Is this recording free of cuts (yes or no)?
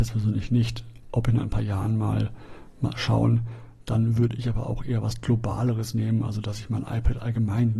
yes